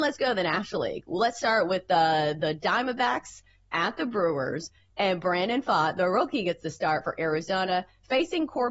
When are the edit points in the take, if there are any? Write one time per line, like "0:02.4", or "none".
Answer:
none